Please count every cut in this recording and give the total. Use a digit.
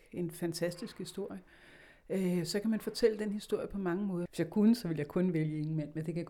1